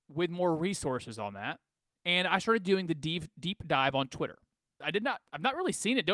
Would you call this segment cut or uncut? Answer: cut